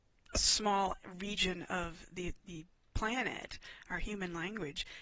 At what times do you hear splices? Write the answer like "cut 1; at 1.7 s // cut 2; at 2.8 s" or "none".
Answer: none